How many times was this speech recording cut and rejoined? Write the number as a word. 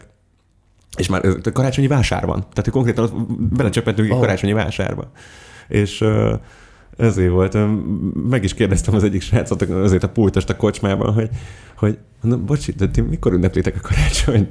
zero